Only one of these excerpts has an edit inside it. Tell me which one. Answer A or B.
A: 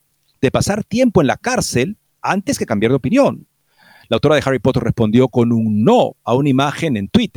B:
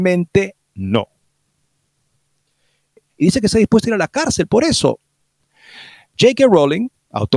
B